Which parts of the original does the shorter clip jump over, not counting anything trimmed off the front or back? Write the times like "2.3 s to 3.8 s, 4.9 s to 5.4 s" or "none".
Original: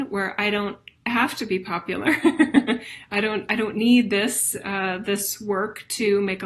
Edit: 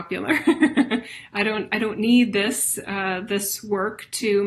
none